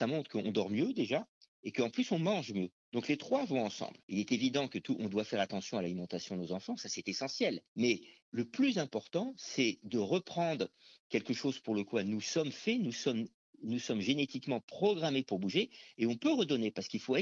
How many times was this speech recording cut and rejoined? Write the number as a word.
zero